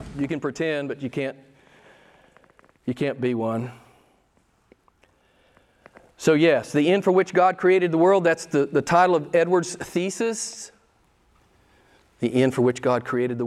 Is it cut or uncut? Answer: uncut